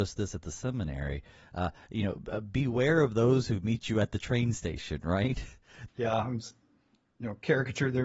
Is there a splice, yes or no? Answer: yes